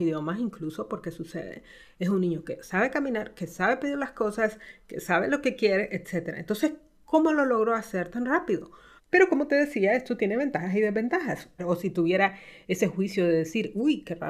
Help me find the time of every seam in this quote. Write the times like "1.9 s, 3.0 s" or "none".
9.0 s, 11.6 s